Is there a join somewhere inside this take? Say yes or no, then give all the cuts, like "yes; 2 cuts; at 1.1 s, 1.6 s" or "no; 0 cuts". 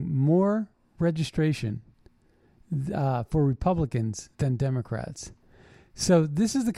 yes; 1 cut; at 4.3 s